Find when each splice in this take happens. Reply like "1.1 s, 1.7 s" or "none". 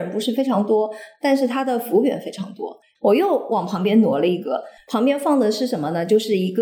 2.9 s